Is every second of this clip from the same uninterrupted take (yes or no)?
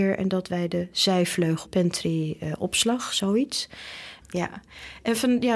no